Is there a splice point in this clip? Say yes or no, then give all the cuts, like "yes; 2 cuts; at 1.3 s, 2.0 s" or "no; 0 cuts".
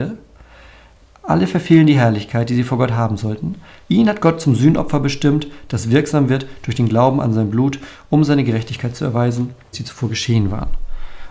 yes; 2 cuts; at 3.8 s, 9.7 s